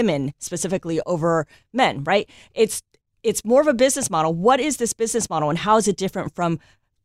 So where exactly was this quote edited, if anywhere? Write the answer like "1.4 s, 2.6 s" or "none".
none